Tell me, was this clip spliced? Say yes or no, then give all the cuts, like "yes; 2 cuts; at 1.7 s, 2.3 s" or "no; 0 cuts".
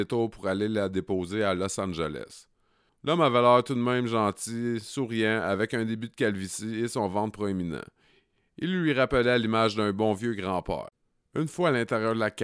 yes; 1 cut; at 2.9 s